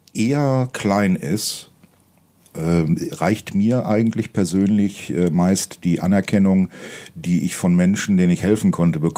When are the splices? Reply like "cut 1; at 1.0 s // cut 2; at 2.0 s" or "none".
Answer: none